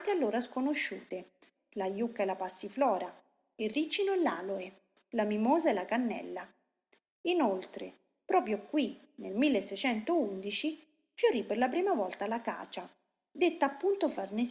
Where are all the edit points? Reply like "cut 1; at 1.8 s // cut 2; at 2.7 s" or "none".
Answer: cut 1; at 1.5 s